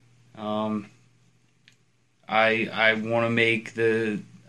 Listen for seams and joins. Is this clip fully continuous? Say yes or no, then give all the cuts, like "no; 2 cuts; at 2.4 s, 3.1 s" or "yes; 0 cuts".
yes; 0 cuts